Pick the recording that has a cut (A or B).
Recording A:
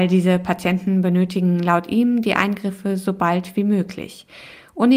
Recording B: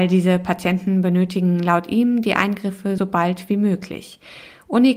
B